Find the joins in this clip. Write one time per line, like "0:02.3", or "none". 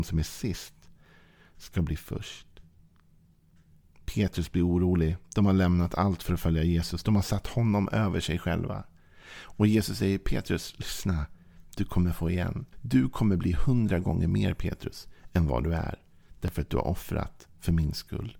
0:12.7